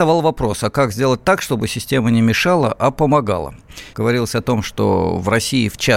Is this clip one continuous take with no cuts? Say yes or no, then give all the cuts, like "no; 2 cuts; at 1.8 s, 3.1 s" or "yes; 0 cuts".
no; 1 cut; at 3.9 s